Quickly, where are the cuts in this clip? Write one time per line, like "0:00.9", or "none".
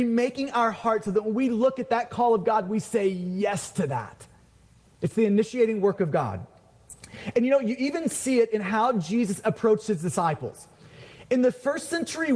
none